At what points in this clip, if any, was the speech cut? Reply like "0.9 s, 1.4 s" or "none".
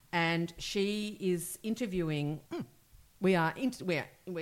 2.5 s